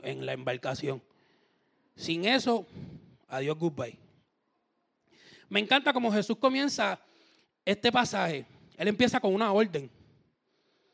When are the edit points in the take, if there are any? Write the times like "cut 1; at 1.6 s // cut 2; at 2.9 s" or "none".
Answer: none